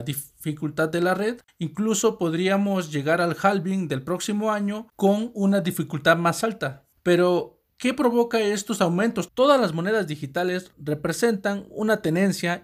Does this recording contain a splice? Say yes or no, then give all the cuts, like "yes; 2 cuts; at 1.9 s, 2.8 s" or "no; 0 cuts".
yes; 2 cuts; at 1.5 s, 9.3 s